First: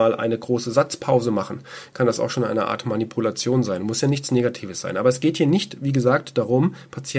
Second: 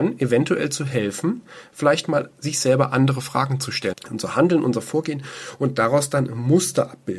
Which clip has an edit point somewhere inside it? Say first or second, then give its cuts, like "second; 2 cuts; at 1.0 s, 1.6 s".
second; 1 cut; at 3.9 s